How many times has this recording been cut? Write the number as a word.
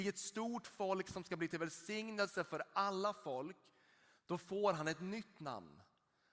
zero